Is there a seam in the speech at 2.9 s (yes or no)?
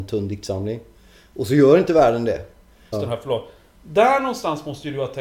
yes